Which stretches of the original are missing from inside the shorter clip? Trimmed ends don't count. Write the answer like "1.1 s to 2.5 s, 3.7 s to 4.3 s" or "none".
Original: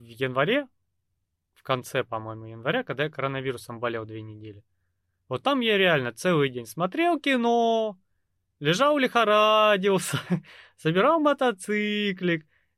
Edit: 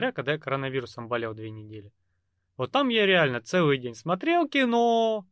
none